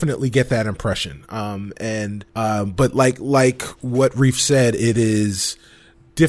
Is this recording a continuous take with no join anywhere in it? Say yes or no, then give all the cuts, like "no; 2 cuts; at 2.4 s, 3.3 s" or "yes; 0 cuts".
no; 1 cut; at 2.3 s